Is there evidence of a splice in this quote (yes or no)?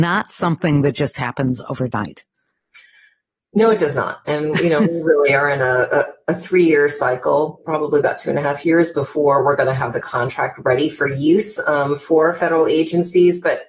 no